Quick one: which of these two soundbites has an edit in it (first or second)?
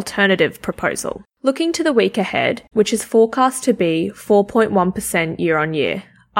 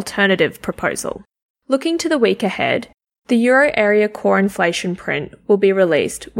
first